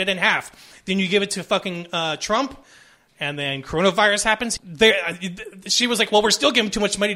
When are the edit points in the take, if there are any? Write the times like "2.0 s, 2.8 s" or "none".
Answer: 4.6 s